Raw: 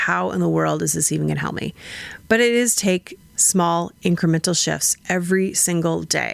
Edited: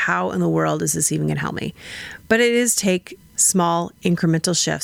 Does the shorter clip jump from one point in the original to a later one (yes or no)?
no